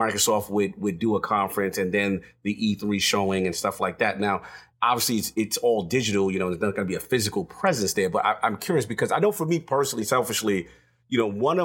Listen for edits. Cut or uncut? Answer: uncut